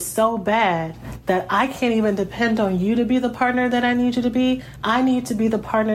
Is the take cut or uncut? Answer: uncut